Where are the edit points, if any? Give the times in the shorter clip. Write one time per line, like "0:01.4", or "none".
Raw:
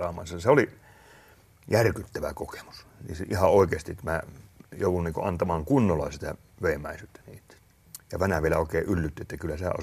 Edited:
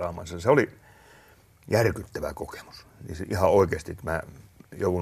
none